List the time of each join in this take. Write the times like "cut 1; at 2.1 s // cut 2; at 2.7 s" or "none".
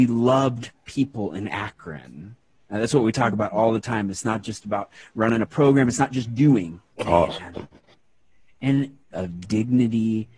cut 1; at 6.9 s // cut 2; at 9.1 s